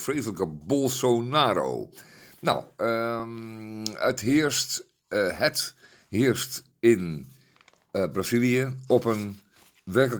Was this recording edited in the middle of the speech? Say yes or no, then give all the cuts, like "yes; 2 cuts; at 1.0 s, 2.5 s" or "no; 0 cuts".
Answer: no; 0 cuts